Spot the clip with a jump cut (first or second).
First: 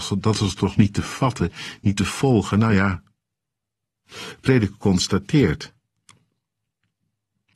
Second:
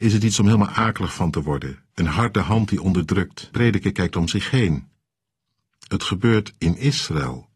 second